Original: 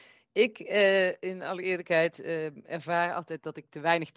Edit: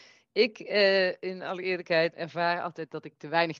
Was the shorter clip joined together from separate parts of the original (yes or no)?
yes